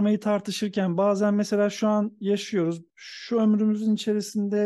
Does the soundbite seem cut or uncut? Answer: cut